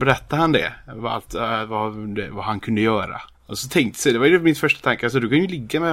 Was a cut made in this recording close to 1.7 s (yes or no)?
no